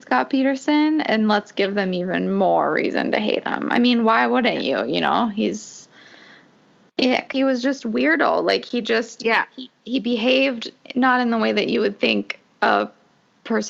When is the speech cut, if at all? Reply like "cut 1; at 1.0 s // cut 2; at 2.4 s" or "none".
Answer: cut 1; at 7.3 s